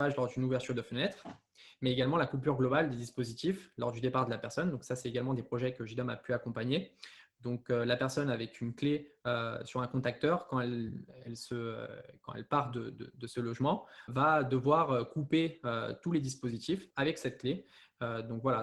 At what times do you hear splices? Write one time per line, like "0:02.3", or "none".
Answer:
0:14.1
0:16.9